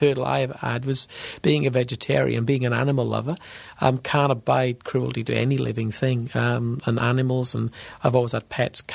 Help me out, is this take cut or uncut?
uncut